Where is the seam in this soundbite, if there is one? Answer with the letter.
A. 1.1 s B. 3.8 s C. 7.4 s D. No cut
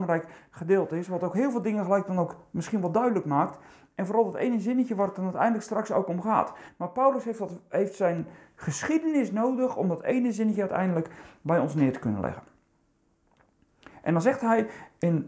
D